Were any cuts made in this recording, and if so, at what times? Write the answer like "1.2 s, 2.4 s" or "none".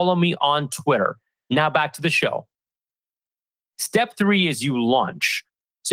none